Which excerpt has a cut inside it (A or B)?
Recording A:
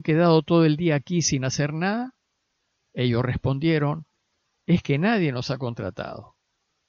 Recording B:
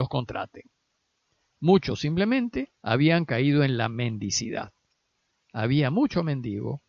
B